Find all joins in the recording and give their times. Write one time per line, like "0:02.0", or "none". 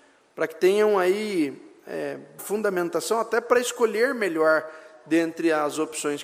0:02.4